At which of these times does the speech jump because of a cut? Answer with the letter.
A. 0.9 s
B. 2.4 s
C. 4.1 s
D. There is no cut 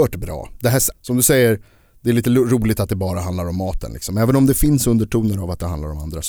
A